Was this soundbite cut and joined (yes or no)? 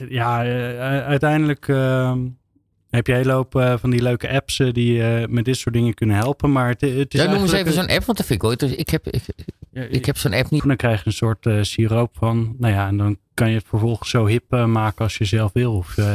yes